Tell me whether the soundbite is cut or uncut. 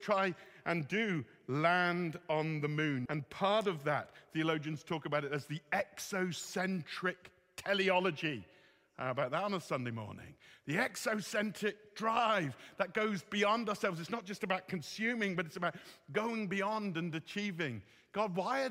cut